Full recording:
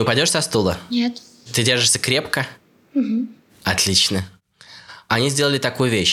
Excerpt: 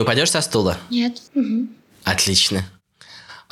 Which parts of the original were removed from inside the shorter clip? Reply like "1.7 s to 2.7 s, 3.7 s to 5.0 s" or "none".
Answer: 1.3 s to 2.9 s